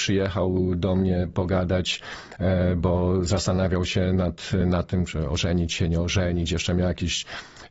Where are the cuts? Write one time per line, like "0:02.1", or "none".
none